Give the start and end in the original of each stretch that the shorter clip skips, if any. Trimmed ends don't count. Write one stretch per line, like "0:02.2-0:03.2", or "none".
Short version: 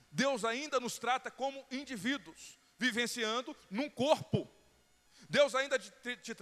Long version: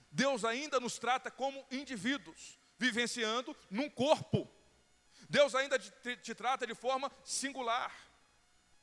none